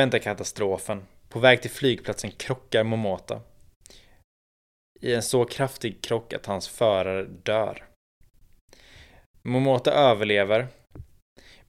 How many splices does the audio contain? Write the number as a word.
zero